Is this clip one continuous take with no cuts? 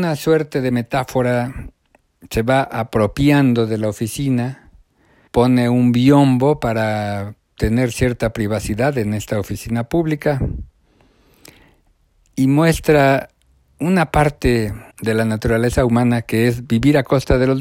no; 2 cuts; at 5.3 s, 14.9 s

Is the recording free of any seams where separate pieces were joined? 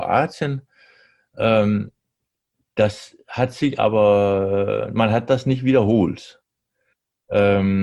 yes; 0 cuts

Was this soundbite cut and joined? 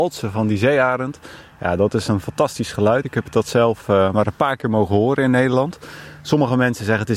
no; 0 cuts

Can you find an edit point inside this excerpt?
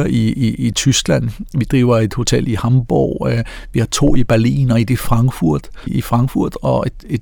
yes; 1 cut; at 5.9 s

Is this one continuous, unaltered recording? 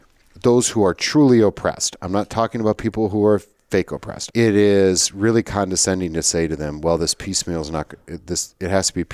no; 1 cut; at 4.3 s

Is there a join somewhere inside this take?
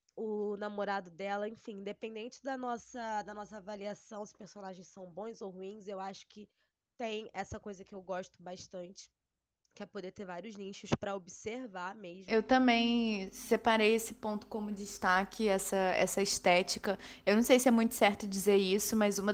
no; 0 cuts

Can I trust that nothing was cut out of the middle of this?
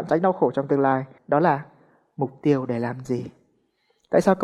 no; 1 cut; at 1.2 s

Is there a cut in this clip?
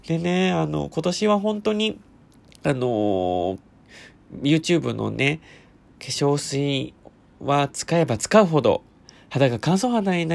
no; 0 cuts

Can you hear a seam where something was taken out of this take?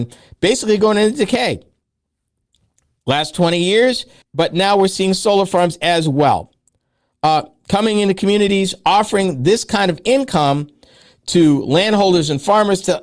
yes; 1 cut; at 4.2 s

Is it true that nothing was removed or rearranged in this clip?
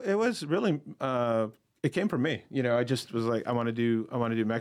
yes; 0 cuts

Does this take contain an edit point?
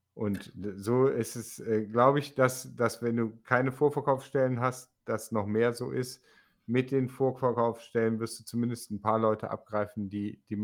no; 0 cuts

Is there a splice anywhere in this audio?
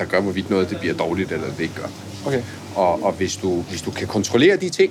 no; 0 cuts

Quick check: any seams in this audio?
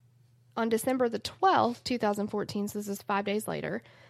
no; 0 cuts

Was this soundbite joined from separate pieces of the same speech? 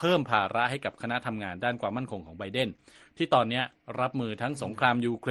no; 0 cuts

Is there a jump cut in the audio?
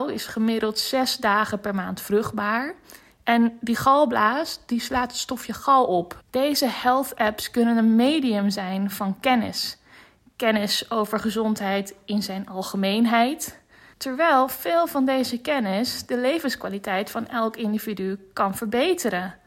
yes; 2 cuts; at 6.2 s, 13.9 s

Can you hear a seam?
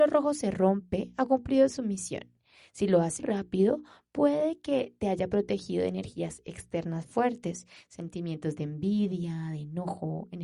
yes; 1 cut; at 3.2 s

